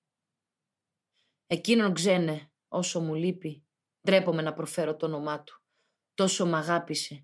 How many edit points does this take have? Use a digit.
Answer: 0